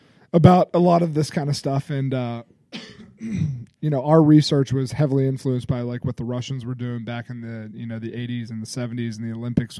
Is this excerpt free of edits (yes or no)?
yes